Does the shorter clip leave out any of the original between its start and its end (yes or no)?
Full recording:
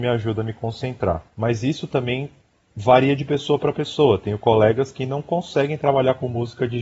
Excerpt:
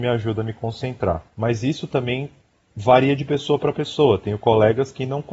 no